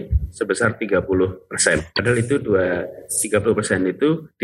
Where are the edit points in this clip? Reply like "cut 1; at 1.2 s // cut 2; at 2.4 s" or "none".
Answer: cut 1; at 1.9 s

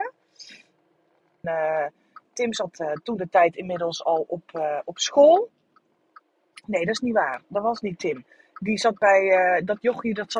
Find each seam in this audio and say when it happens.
cut 1; at 1.4 s

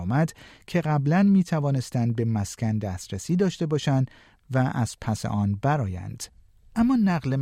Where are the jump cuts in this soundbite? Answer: none

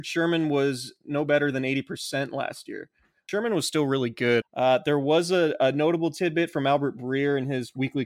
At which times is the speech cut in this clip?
cut 1; at 3.3 s // cut 2; at 4.4 s

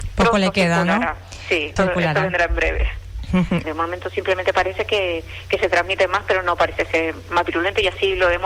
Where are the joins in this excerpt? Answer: cut 1; at 1.8 s // cut 2; at 3.6 s

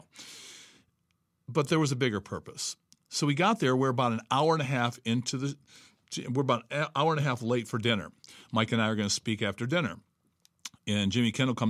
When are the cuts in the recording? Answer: none

